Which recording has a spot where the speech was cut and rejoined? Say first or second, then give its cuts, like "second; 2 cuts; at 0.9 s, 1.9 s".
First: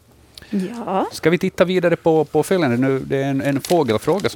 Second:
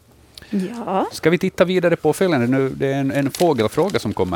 second; 1 cut; at 2.0 s